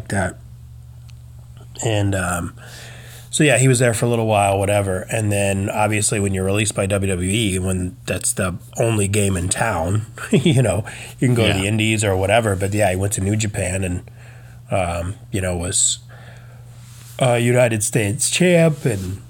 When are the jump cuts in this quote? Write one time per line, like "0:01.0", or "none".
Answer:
none